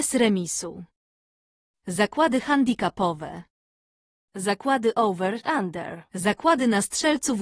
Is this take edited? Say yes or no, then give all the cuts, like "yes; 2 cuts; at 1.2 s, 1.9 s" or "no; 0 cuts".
yes; 1 cut; at 6.1 s